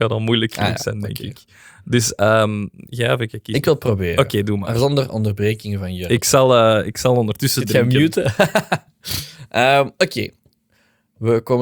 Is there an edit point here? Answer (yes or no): no